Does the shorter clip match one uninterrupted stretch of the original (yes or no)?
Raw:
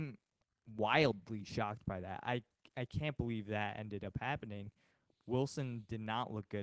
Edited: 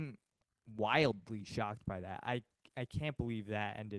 yes